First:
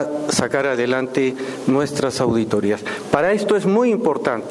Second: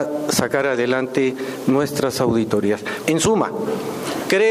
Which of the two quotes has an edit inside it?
second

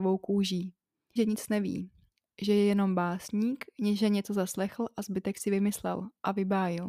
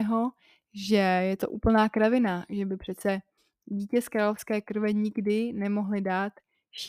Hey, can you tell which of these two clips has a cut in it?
first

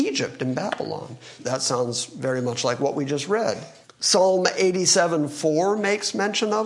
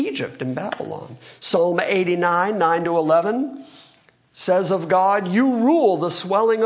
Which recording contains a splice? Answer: first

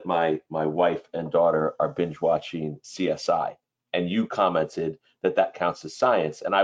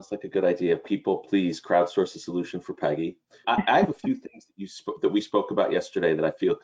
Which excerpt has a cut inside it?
second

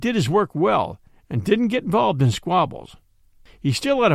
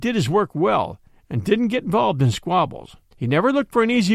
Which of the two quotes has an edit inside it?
second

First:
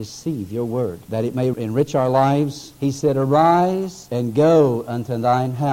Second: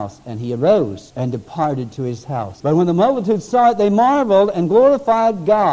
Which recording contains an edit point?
first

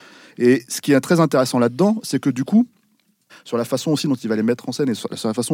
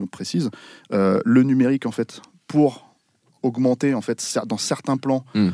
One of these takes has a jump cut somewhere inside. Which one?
first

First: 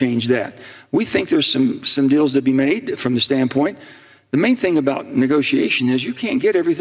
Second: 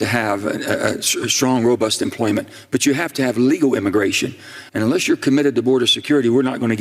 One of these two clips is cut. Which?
second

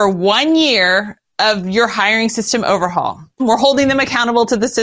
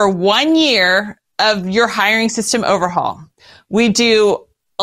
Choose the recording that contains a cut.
first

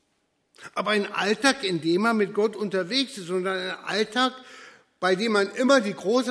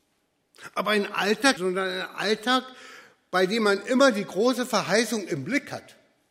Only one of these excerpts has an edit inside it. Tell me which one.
second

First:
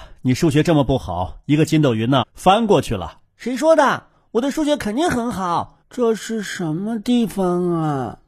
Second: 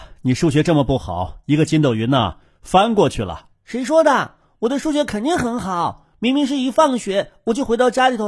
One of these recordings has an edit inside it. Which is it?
first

